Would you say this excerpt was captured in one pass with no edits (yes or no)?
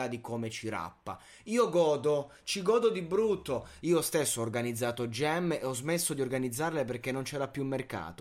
no